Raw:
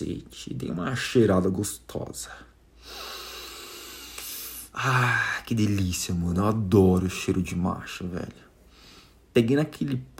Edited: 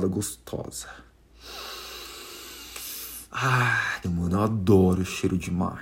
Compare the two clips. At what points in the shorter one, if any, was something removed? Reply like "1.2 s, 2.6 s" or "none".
4.0 s